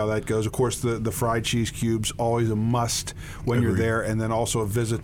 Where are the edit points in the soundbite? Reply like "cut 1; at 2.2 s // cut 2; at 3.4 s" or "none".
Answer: none